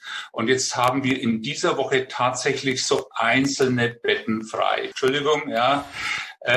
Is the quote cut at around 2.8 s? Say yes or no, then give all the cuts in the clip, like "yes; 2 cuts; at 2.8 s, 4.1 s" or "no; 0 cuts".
no; 1 cut; at 4.9 s